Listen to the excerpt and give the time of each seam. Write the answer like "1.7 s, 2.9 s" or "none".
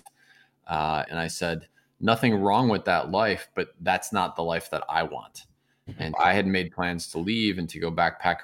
1.1 s, 6.1 s